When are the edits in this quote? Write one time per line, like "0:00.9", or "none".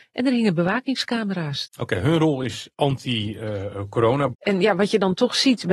0:01.7
0:04.3